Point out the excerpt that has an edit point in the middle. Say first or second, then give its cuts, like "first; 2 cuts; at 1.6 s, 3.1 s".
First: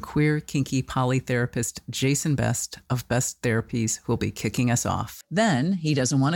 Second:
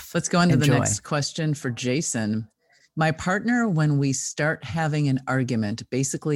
first; 1 cut; at 5.2 s